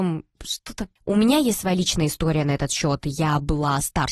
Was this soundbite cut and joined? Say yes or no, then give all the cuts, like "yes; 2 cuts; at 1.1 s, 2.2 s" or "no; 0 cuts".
yes; 1 cut; at 1.0 s